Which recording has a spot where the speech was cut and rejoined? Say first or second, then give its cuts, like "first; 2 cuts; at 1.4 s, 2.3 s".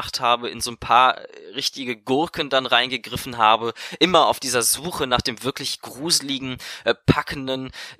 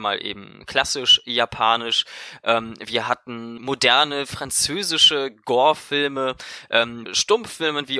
second; 2 cuts; at 3.6 s, 7.1 s